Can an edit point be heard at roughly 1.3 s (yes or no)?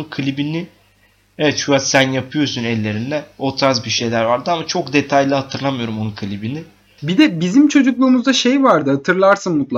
no